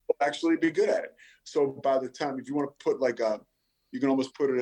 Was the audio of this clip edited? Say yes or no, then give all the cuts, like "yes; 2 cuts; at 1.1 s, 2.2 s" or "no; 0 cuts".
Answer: no; 0 cuts